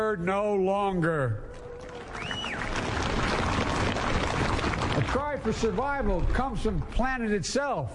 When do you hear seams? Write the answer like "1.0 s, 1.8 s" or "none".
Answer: none